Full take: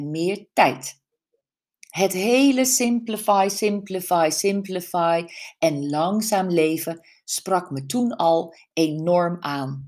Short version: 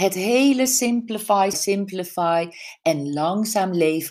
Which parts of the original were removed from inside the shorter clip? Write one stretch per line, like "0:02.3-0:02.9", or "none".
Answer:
0:03.5-0:04.3